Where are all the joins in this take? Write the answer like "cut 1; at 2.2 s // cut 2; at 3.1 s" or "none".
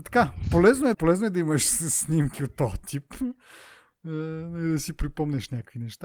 cut 1; at 0.9 s